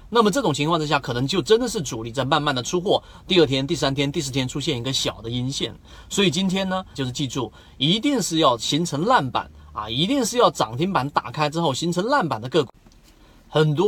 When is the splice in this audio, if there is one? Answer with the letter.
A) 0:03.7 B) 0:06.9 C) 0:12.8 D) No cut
B